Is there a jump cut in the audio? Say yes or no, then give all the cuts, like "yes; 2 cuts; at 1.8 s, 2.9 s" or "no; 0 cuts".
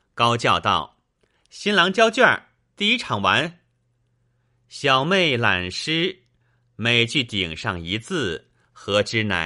no; 0 cuts